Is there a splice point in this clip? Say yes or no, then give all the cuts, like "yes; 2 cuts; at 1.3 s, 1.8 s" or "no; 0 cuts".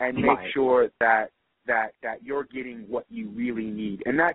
no; 0 cuts